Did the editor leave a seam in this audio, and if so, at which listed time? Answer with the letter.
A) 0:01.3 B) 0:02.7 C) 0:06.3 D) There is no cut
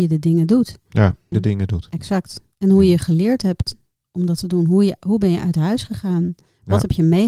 A